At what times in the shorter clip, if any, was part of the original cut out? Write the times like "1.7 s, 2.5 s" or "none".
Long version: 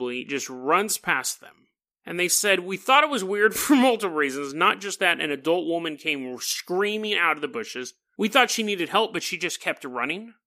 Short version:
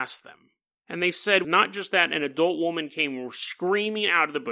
1.4 s